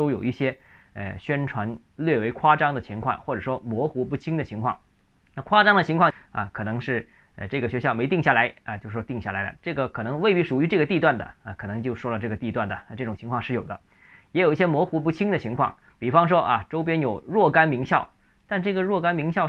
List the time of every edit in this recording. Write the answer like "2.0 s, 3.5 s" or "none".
none